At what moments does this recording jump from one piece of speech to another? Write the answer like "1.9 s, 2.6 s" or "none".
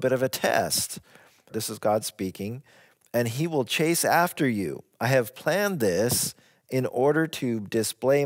1.5 s